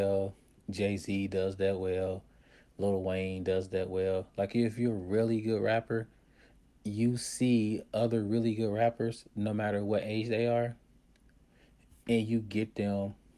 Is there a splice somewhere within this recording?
no; 0 cuts

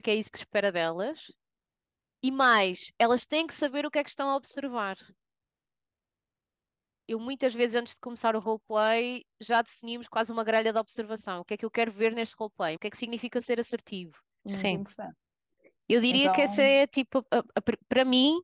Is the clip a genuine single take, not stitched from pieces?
no; 2 cuts; at 12.8 s, 14.4 s

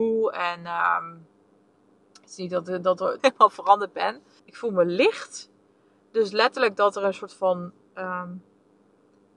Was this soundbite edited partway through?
yes; 2 cuts; at 3.2 s, 4.4 s

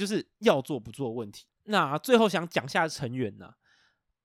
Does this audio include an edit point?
no; 0 cuts

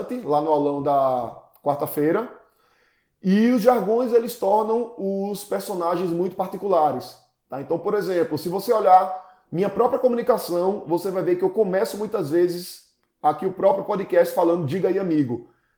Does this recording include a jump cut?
no; 0 cuts

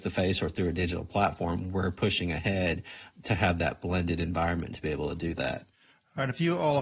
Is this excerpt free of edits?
yes; 0 cuts

